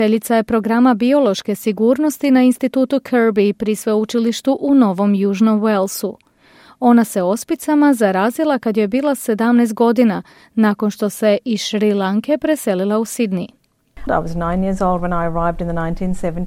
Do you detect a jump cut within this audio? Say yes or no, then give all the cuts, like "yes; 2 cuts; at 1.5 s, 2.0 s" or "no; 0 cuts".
yes; 1 cut; at 14.1 s